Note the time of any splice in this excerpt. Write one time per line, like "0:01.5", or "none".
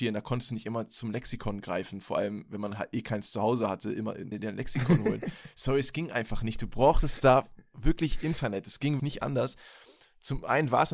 0:04.3
0:09.0